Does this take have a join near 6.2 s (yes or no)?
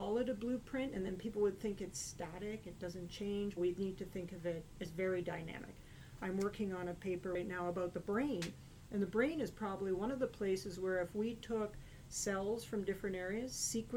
no